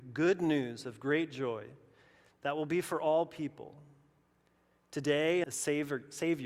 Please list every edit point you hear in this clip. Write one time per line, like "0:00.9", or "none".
0:05.4

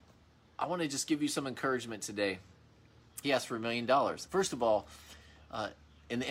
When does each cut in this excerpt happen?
0:03.2
0:04.3

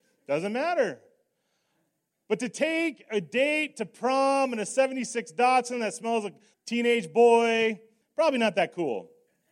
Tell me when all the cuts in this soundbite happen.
0:06.5
0:08.0

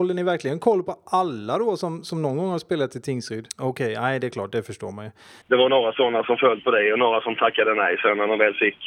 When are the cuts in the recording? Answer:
0:03.5
0:05.4

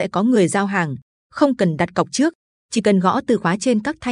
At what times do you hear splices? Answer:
0:02.6

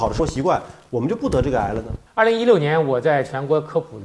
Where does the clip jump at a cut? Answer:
0:02.1

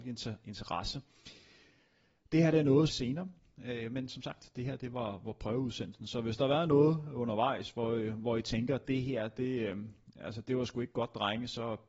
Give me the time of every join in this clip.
0:02.9

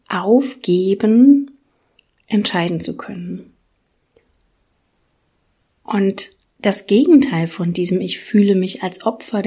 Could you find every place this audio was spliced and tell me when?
none

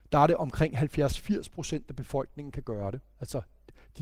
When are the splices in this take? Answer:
none

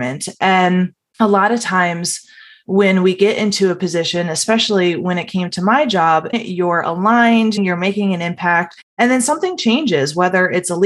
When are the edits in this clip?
0:06.3
0:07.6
0:08.9

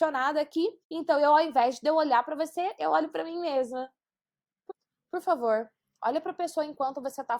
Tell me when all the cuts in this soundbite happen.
none

